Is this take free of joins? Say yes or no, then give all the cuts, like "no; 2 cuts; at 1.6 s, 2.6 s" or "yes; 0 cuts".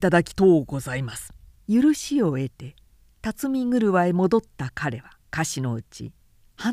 no; 2 cuts; at 1.6 s, 5.2 s